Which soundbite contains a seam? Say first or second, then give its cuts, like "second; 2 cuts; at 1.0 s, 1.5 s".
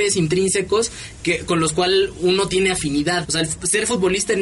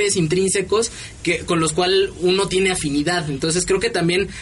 first; 1 cut; at 3.2 s